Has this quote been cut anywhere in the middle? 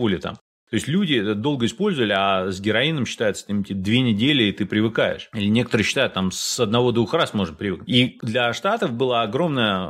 no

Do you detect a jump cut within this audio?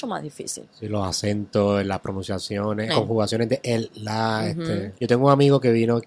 yes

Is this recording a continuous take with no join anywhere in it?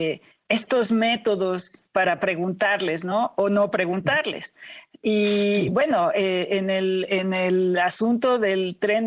yes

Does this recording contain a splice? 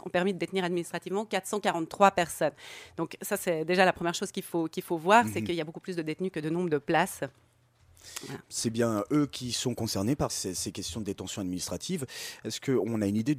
yes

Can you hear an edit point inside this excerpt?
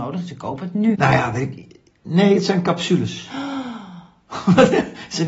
yes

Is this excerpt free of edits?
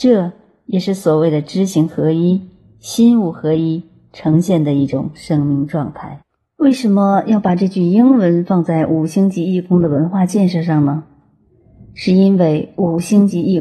yes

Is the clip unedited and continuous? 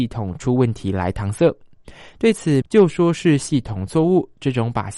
no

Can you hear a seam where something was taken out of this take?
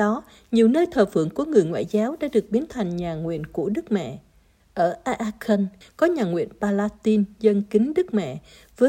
yes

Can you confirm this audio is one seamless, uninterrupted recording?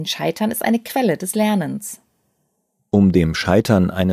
yes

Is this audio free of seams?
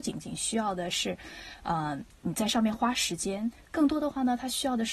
yes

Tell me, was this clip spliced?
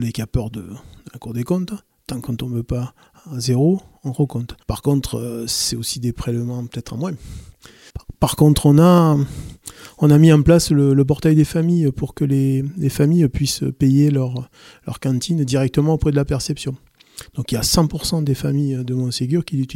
yes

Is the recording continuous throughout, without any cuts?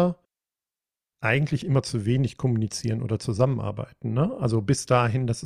yes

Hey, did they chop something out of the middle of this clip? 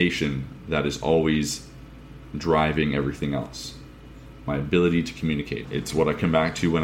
yes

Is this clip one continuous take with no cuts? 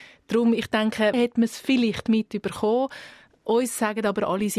no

